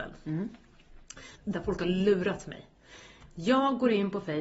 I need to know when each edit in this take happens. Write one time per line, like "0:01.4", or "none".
0:01.3

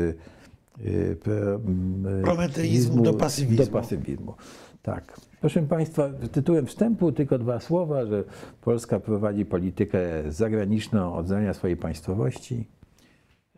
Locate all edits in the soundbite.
none

